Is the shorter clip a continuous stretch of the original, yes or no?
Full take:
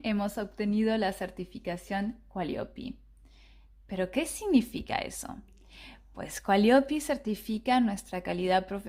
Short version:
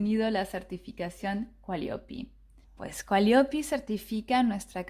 no